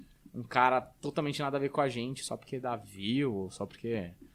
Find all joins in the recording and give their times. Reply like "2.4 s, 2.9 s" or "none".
none